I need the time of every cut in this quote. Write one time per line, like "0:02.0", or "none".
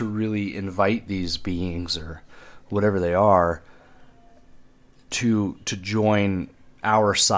none